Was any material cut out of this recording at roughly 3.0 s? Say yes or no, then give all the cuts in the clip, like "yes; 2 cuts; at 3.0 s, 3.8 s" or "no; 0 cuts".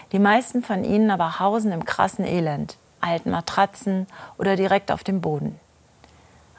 yes; 1 cut; at 3.0 s